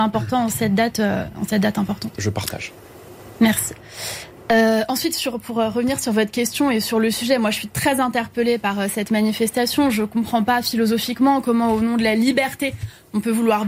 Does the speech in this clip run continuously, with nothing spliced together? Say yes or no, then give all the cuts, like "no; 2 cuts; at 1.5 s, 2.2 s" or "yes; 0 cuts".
yes; 0 cuts